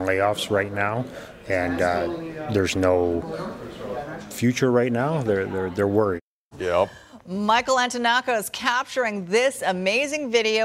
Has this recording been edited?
yes; 1 cut; at 6.5 s

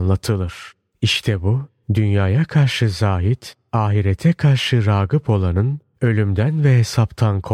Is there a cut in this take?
no; 0 cuts

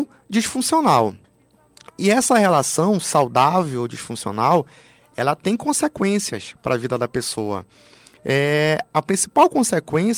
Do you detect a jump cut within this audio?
no; 0 cuts

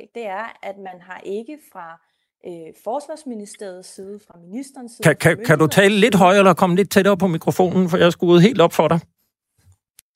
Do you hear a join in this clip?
no; 0 cuts

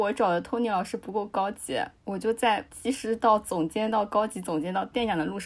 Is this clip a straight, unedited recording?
yes; 0 cuts

